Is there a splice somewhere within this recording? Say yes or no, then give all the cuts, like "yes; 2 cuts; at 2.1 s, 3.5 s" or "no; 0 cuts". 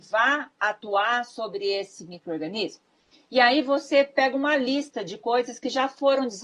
no; 0 cuts